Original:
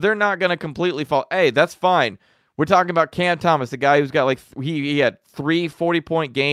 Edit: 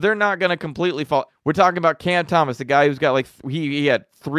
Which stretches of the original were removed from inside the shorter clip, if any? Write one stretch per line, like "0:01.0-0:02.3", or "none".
0:01.3-0:02.4